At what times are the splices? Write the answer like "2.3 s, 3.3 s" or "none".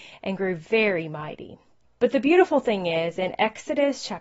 1.9 s